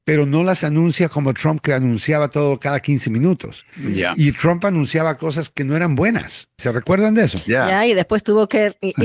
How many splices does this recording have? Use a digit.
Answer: 1